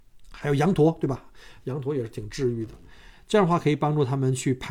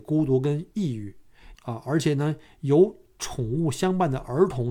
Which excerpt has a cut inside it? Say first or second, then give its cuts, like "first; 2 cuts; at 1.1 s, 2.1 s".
second; 1 cut; at 1.5 s